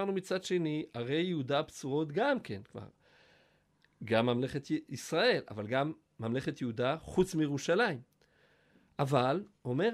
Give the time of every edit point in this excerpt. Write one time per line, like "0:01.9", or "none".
none